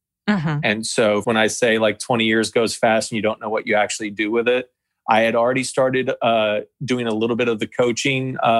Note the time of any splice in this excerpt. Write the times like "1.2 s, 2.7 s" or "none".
1.2 s